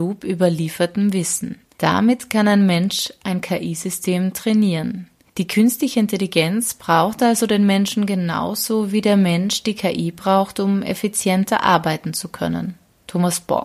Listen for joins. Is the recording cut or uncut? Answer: uncut